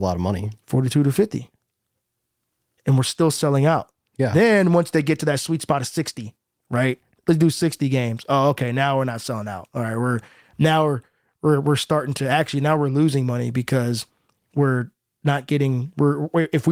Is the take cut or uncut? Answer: uncut